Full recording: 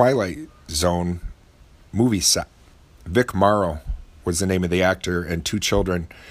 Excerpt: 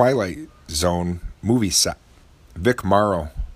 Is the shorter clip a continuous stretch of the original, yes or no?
no